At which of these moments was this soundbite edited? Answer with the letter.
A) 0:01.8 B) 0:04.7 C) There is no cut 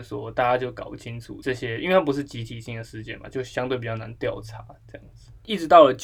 C